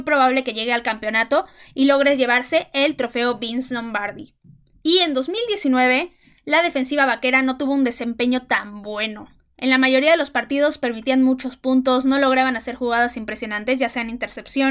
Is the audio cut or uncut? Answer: cut